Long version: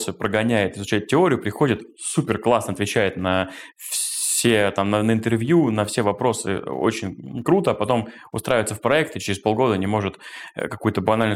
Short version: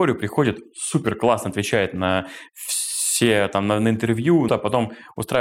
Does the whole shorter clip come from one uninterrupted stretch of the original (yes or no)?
no